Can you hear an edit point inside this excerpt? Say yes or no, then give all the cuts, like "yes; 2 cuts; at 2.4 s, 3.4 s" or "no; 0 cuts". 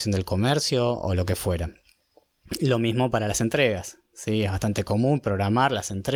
no; 0 cuts